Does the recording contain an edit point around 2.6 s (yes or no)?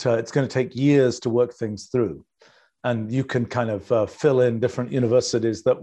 no